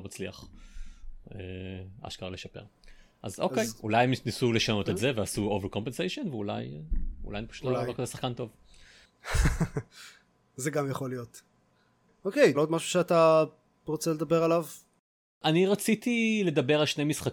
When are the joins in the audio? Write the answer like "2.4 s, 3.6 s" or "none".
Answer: 12.5 s

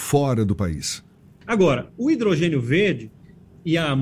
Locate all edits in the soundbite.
1.4 s

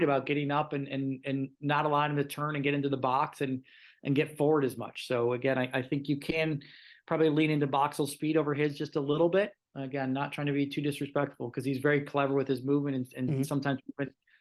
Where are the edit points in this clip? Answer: none

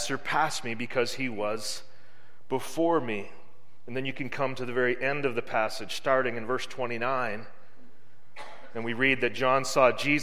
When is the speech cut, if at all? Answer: none

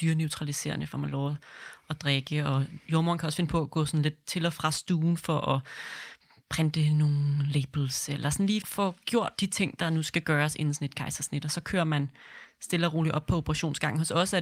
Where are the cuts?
8.6 s

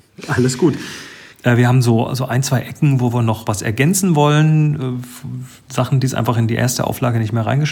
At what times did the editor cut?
1.3 s

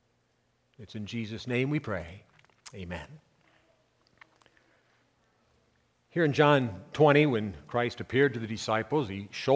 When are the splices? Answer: none

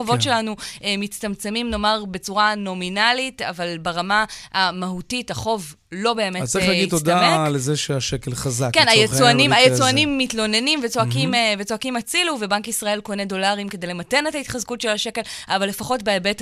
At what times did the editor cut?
none

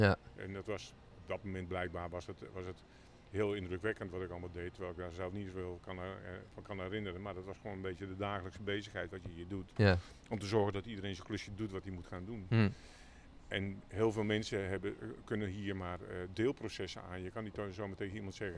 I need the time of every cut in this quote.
none

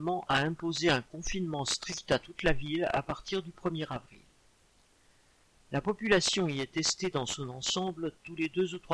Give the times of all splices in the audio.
none

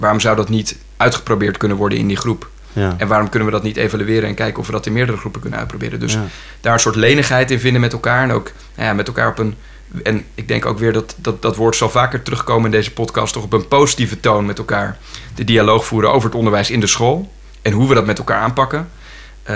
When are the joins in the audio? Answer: none

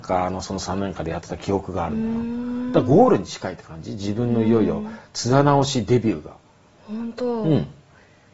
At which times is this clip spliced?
6.7 s

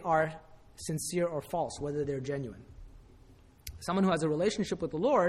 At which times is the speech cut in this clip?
none

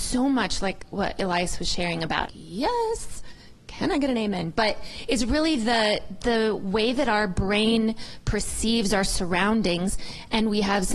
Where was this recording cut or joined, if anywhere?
2.2 s

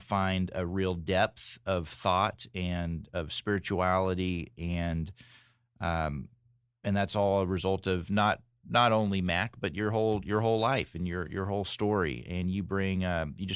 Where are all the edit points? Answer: none

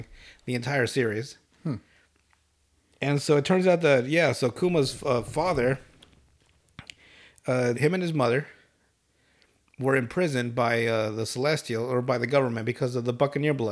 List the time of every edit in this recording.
7.7 s

